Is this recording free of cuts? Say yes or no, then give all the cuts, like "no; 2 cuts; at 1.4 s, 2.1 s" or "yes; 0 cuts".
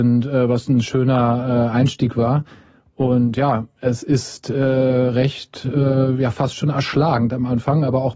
yes; 0 cuts